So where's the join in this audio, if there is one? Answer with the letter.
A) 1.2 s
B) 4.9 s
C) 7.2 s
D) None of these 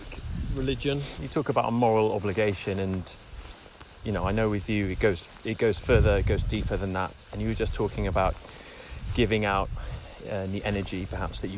A